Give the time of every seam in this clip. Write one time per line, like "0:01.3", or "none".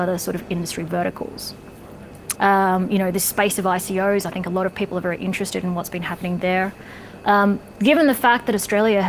0:02.3